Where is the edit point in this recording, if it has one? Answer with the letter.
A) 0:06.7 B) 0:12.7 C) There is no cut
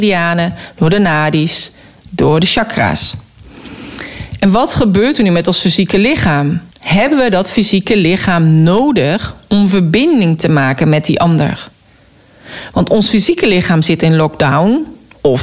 A